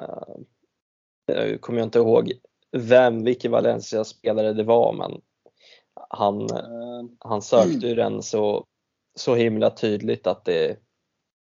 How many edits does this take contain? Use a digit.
0